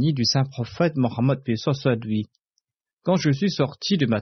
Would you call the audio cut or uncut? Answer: uncut